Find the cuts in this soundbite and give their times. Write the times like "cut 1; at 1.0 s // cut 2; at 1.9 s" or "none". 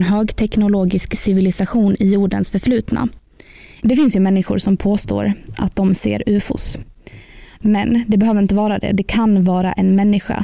cut 1; at 3.8 s // cut 2; at 7.5 s